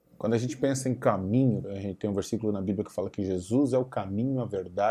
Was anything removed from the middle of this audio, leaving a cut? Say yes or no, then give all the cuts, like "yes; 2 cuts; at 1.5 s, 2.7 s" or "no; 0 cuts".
yes; 1 cut; at 1.6 s